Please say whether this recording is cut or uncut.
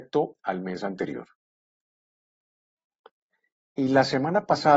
uncut